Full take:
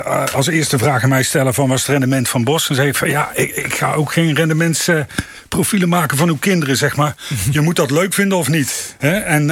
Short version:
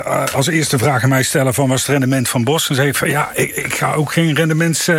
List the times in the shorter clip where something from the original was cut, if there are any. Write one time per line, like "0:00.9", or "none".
none